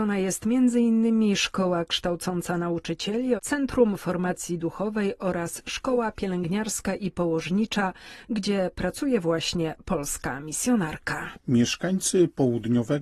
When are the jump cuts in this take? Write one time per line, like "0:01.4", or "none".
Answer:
0:03.4
0:11.3